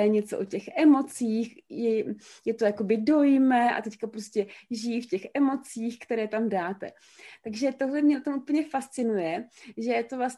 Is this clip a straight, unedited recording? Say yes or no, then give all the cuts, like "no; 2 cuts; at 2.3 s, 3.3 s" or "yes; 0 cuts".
yes; 0 cuts